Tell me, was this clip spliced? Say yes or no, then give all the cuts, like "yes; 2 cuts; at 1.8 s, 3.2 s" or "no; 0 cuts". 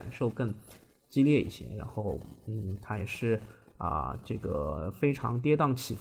no; 0 cuts